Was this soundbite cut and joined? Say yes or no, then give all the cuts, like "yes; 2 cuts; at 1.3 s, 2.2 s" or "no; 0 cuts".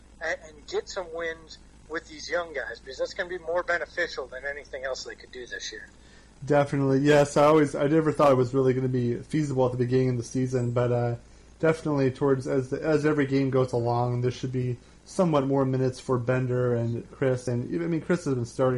no; 0 cuts